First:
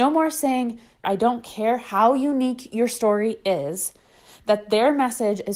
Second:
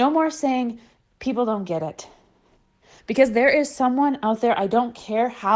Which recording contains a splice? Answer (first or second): first